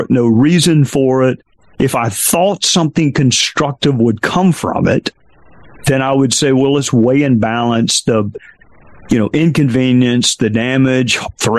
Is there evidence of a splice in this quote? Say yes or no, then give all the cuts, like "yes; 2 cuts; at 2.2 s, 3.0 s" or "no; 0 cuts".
no; 0 cuts